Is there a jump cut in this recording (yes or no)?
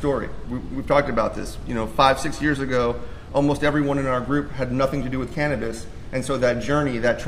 no